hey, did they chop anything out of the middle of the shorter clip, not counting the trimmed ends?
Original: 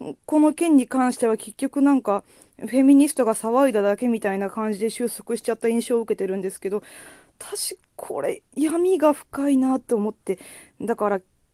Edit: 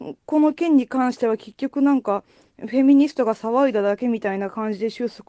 no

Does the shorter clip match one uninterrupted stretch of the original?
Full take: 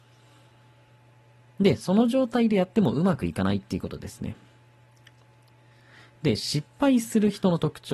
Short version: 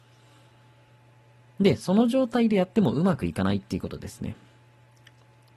yes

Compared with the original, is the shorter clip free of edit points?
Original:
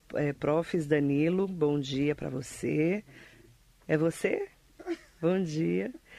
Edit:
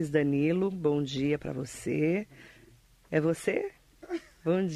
yes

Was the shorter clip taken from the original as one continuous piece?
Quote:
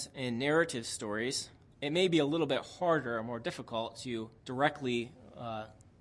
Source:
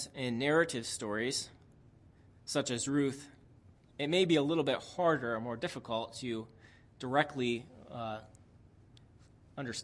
no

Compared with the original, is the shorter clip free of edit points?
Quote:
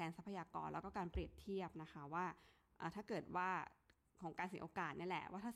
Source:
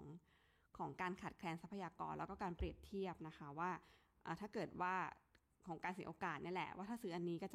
yes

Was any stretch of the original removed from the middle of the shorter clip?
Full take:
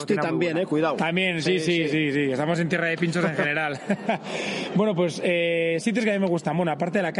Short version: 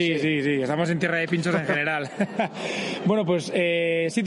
no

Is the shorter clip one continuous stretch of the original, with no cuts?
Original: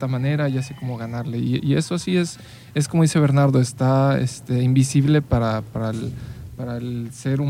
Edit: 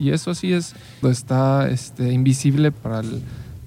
no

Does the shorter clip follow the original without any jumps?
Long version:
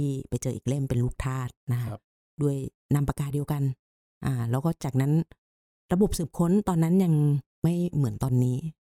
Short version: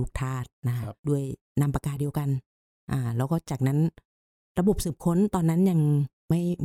no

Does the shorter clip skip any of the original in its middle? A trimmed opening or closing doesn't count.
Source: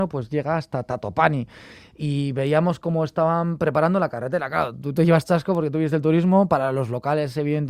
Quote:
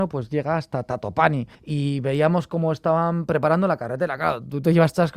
yes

